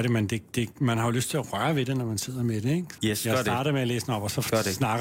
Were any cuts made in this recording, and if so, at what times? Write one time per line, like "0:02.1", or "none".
0:03.0